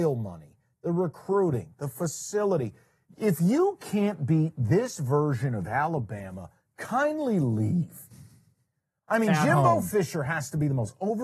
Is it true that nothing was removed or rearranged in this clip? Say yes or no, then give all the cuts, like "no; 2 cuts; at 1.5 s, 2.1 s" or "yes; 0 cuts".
yes; 0 cuts